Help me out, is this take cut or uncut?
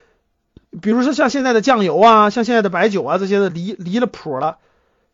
uncut